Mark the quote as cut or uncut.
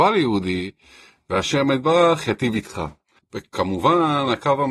cut